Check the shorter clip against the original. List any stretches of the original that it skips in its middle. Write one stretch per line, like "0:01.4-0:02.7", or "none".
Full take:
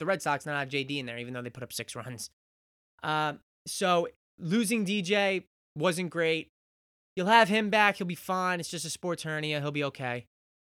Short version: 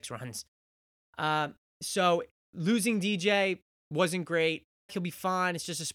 0:06.7-0:07.9